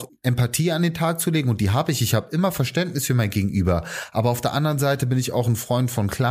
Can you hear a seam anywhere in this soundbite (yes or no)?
no